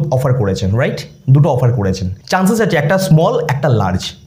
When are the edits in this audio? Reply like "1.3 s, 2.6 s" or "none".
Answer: 2.2 s